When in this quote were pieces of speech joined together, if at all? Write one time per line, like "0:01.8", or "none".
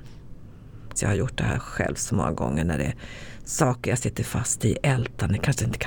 0:01.0